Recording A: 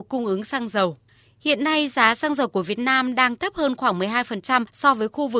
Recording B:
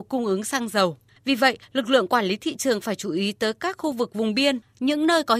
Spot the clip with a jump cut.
B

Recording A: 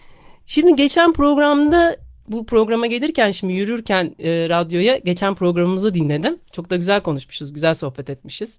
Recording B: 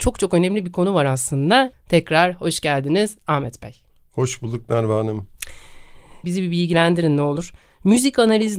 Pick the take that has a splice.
B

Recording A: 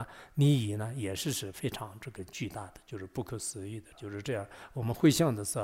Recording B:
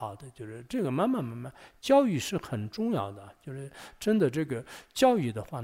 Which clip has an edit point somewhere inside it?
A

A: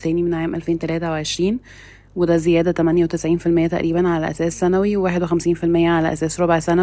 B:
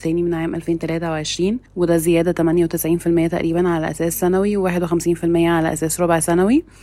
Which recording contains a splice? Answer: B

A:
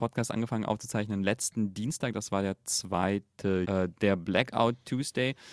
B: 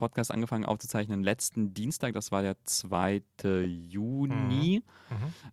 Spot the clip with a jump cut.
A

